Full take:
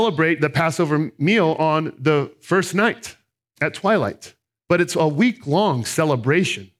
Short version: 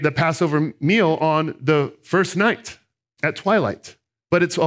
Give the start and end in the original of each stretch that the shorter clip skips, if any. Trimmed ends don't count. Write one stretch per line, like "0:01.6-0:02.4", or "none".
none